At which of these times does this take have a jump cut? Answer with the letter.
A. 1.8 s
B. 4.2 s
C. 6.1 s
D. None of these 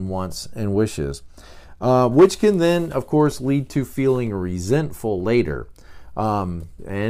D